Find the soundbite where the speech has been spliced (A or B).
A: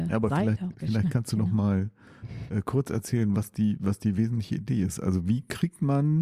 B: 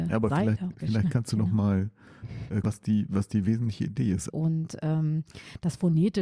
B